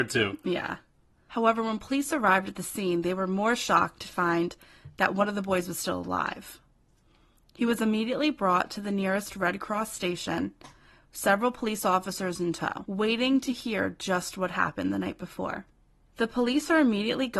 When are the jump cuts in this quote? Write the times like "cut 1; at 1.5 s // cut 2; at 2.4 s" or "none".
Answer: none